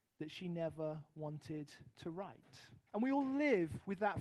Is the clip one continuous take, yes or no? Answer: no